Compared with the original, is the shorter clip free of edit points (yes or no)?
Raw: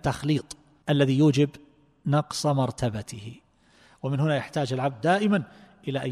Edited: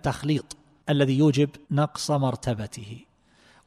no